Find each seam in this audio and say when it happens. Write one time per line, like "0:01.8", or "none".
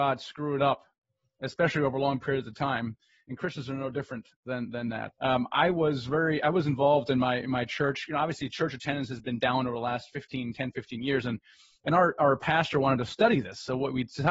0:05.1